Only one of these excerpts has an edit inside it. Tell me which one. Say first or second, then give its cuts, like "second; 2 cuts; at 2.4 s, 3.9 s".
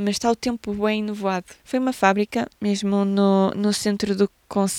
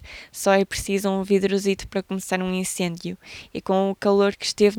first; 1 cut; at 1.6 s